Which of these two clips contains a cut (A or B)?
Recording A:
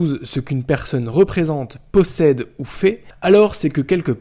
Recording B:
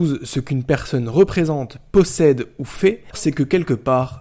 B